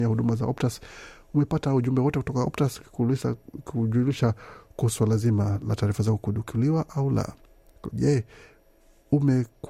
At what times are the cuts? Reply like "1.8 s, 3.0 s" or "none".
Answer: 7.9 s